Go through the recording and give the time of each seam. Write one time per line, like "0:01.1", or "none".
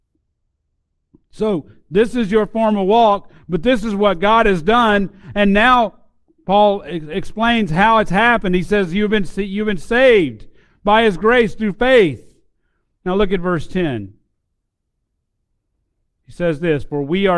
none